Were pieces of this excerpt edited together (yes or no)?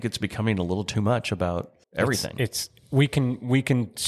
yes